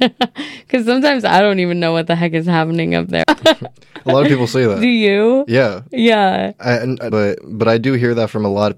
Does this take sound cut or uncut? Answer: cut